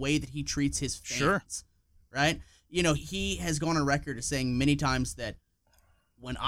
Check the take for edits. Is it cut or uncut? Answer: cut